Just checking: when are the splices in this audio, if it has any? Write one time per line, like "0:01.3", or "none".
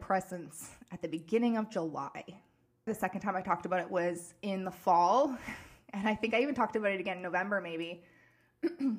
0:02.9